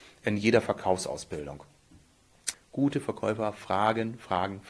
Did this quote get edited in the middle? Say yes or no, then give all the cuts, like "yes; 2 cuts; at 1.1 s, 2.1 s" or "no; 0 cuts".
yes; 1 cut; at 2.5 s